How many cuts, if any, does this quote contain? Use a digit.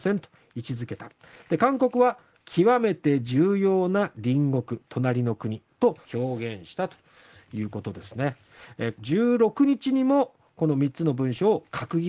2